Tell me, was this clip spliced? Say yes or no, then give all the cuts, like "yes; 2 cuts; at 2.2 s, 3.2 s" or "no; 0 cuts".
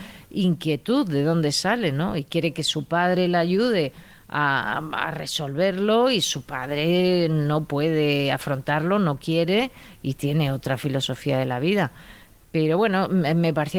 no; 0 cuts